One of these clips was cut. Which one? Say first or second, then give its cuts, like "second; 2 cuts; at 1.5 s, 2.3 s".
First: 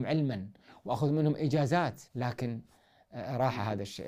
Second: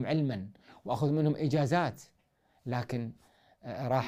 first; 1 cut; at 2.1 s